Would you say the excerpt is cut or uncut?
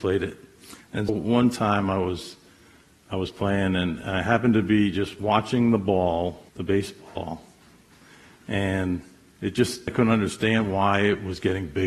cut